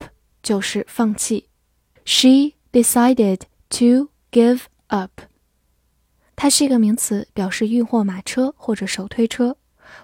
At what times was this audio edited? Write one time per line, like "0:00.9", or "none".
0:02.0
0:06.3